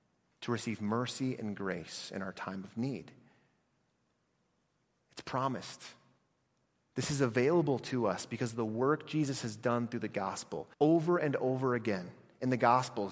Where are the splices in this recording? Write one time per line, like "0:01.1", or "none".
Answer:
0:05.0
0:10.7